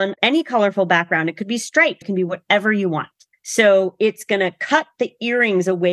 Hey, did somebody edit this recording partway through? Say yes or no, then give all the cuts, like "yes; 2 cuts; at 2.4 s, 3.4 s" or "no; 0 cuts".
yes; 2 cuts; at 2.0 s, 3.3 s